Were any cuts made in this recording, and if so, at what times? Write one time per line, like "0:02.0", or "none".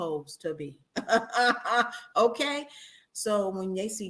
0:03.0

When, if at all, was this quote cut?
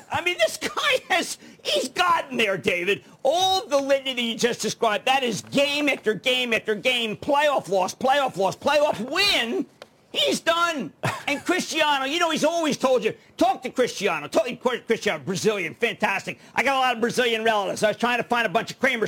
none

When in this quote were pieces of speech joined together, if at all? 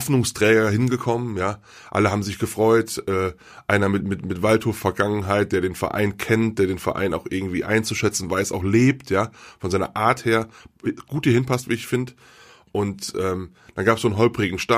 none

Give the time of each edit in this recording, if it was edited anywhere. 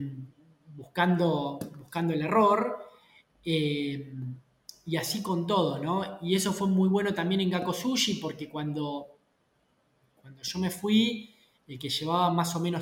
none

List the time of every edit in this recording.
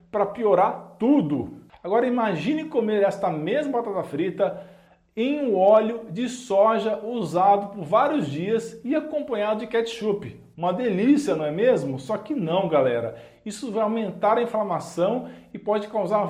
none

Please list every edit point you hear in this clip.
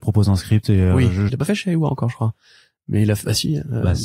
0:01.3

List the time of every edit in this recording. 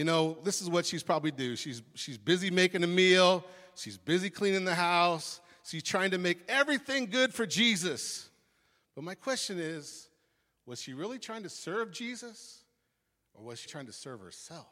0:13.7

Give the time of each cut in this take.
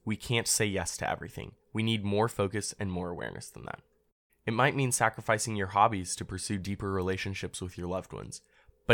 0:04.3

